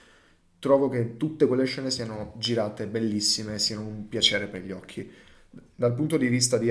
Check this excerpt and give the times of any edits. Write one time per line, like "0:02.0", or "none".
none